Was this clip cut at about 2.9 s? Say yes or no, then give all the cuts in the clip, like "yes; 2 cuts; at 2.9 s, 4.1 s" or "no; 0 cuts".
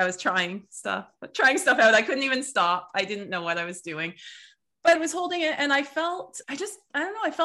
no; 2 cuts; at 4.9 s, 6.4 s